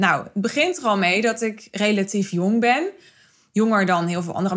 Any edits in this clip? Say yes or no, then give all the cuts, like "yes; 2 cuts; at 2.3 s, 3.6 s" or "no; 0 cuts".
no; 0 cuts